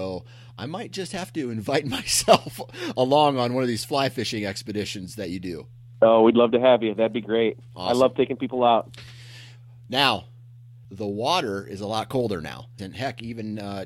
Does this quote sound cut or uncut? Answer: cut